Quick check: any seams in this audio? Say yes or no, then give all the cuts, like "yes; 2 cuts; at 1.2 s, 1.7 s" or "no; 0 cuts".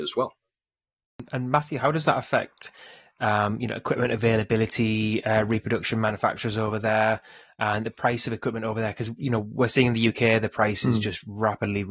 no; 0 cuts